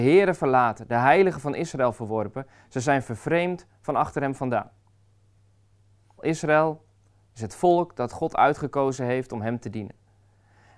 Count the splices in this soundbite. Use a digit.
1